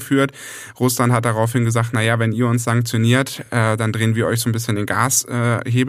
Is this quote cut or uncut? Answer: uncut